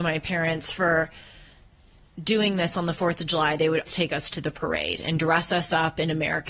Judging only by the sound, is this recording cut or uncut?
cut